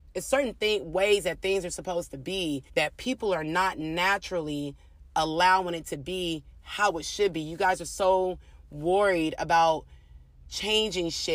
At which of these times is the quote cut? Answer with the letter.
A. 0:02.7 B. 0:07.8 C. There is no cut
A